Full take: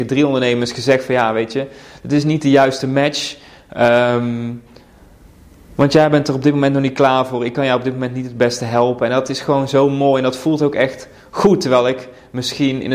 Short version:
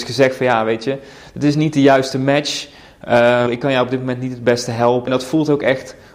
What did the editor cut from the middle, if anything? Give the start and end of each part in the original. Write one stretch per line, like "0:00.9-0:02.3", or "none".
0:04.1-0:07.4
0:09.0-0:10.2